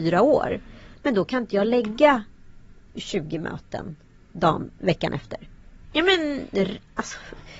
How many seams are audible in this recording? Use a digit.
2